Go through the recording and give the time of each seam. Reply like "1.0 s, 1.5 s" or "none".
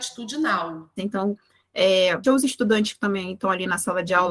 1.0 s, 2.2 s